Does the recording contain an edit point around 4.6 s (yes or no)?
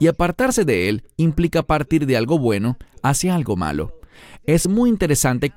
no